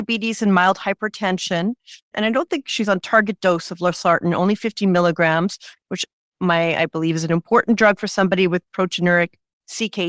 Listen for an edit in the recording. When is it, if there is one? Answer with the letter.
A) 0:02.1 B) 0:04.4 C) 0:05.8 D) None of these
A